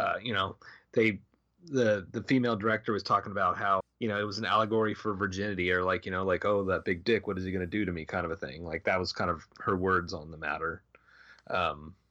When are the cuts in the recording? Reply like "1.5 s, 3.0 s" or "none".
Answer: 3.8 s